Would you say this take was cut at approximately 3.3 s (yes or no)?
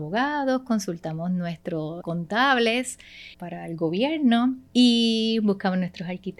yes